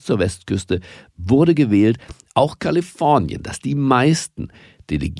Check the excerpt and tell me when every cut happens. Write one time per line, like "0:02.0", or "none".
none